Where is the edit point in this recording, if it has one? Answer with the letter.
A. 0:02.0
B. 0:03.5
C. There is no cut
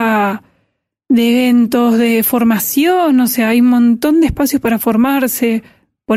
C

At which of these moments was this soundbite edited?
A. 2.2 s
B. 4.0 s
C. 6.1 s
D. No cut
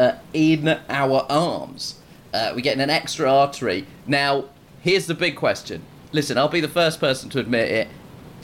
D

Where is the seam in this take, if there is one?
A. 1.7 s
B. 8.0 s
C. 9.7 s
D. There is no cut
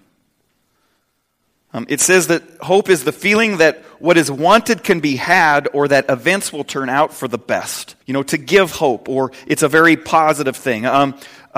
B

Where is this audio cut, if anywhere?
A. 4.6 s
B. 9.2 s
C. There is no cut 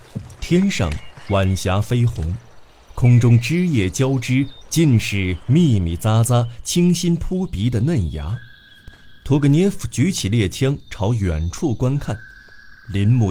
A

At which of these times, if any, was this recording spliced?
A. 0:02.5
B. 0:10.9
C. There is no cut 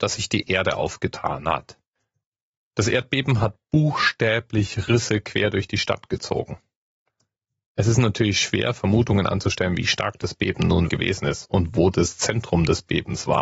B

